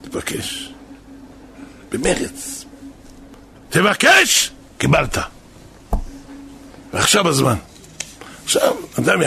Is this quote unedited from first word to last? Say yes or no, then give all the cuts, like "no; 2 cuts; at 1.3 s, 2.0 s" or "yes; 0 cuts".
no; 1 cut; at 3.7 s